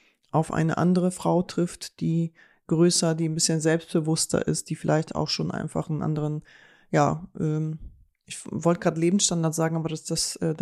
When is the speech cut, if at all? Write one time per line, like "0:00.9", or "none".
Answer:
none